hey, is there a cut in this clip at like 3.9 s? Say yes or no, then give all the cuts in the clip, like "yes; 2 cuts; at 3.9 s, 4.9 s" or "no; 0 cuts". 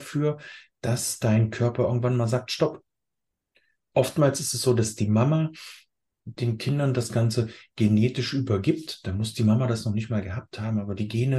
yes; 1 cut; at 3.9 s